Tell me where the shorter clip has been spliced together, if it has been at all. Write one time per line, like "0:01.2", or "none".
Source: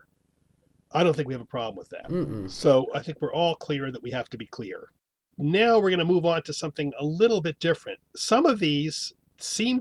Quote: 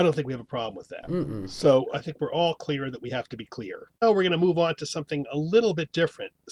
0:04.0

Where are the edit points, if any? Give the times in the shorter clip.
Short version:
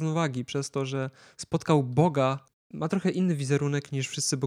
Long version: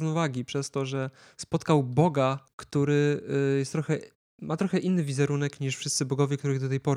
0:02.5

